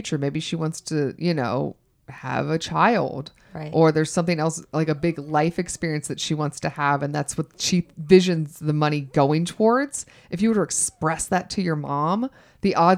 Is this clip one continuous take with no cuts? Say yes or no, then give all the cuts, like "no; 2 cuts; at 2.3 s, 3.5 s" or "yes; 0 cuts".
yes; 0 cuts